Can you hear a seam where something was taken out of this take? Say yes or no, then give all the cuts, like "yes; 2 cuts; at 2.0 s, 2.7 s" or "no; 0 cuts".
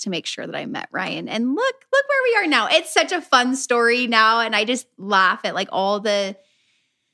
no; 0 cuts